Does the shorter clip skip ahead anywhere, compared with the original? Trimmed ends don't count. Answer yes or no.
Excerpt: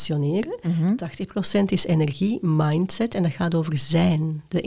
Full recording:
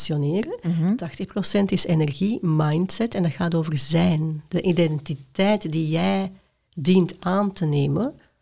no